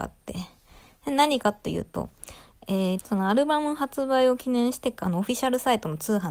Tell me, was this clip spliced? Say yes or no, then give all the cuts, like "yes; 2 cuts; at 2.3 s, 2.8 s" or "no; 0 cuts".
yes; 2 cuts; at 2.9 s, 5.0 s